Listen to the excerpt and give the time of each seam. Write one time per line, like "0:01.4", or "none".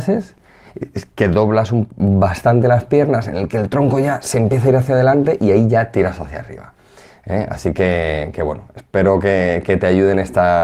none